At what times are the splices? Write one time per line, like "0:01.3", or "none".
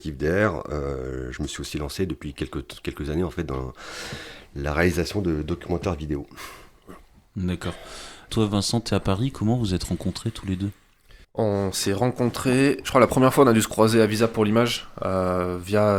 0:08.3
0:11.2